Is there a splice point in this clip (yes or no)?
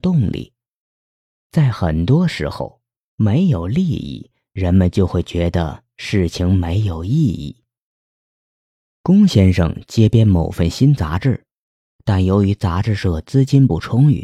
no